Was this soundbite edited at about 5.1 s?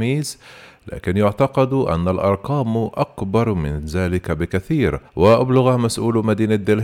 yes; 1 cut; at 5.1 s

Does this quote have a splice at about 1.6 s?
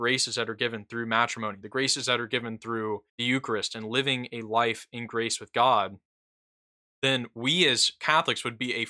yes; 2 cuts; at 1.6 s, 3.1 s

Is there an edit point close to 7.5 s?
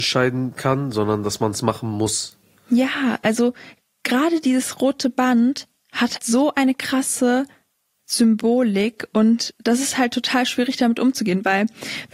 no; 1 cut; at 6.2 s

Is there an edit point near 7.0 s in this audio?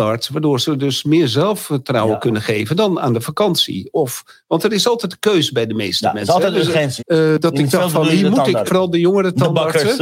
yes; 2 cuts; at 7.0 s, 8.7 s

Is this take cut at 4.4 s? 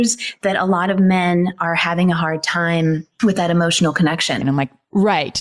yes; 1 cut; at 4.4 s

